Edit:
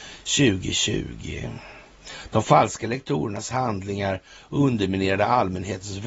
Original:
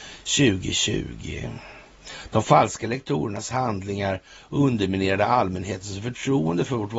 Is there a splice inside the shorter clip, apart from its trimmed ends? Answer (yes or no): no